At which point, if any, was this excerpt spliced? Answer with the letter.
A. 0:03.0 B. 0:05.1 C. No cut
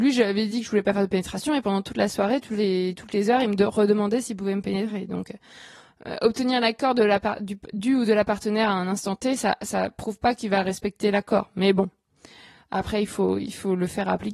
C